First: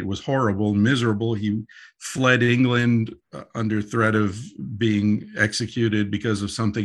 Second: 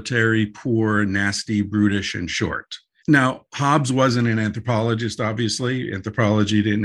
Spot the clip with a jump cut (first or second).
second